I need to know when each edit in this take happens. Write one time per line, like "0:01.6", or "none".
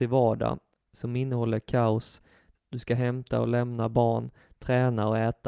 0:02.5